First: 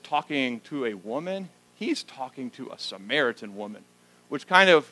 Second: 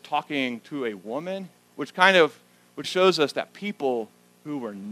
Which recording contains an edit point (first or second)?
second